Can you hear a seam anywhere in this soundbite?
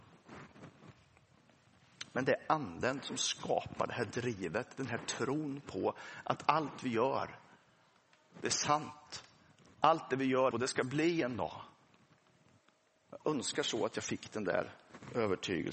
yes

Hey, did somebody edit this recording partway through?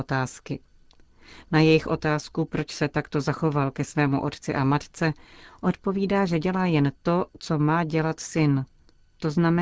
no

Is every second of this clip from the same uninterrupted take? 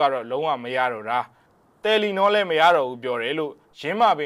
yes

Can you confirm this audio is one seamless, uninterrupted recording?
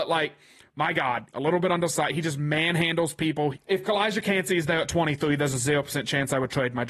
no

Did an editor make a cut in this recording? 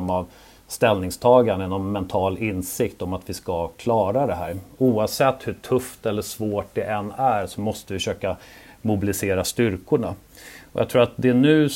no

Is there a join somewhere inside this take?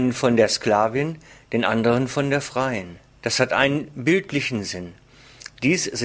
yes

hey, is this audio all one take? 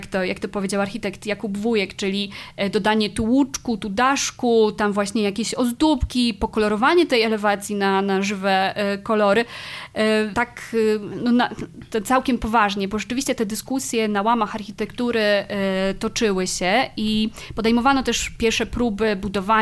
no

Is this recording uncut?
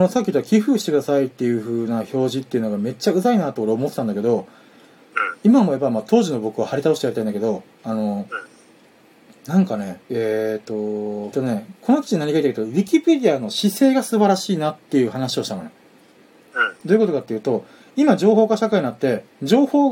no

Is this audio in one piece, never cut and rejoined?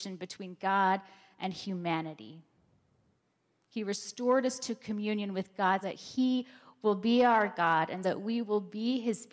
no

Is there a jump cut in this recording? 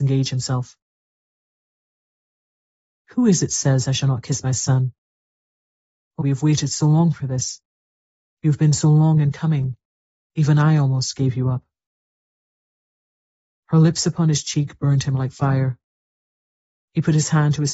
yes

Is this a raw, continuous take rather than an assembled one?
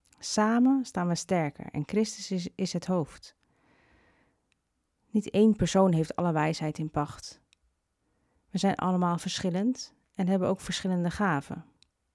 yes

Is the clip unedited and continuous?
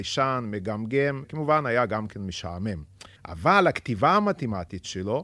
no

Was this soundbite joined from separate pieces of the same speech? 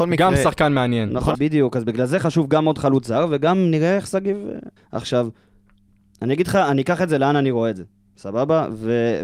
yes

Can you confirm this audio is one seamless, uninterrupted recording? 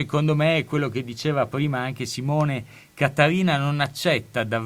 yes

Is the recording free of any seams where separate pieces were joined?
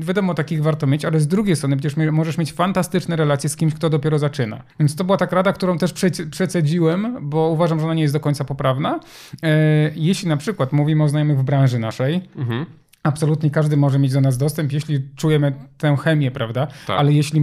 no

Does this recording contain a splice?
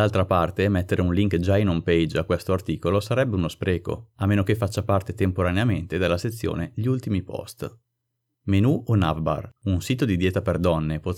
yes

